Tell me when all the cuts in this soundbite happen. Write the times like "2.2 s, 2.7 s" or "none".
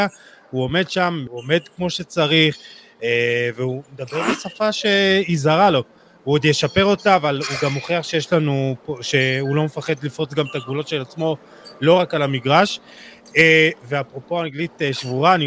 1.3 s